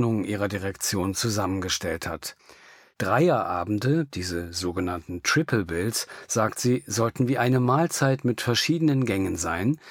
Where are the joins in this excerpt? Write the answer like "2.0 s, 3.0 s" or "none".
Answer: 2.9 s